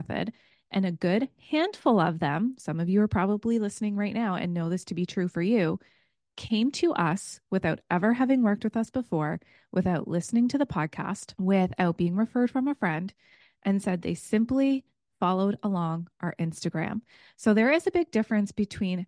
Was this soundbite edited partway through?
no; 0 cuts

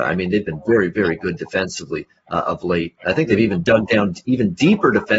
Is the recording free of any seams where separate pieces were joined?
yes; 0 cuts

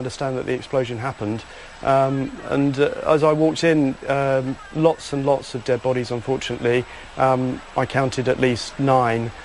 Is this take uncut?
yes; 0 cuts

